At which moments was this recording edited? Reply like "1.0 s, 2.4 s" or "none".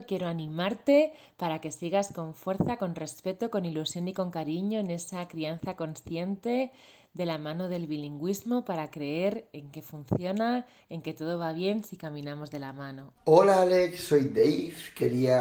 13.2 s